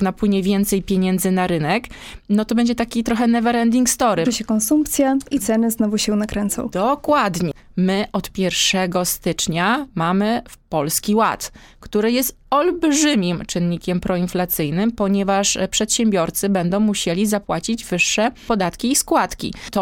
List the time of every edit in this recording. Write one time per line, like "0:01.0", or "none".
0:04.2